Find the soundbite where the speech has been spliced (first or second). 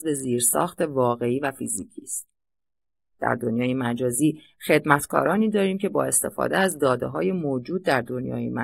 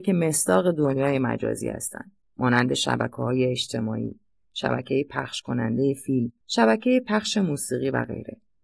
second